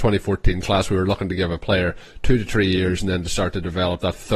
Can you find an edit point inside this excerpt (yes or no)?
no